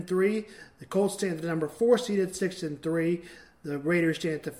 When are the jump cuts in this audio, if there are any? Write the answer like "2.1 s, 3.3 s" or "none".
none